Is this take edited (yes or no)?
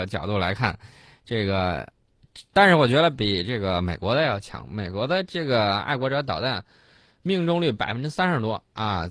yes